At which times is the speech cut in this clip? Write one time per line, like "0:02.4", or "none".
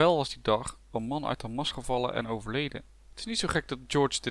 0:03.1